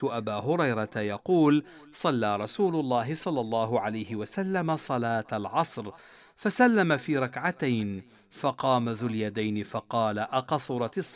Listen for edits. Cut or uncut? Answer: uncut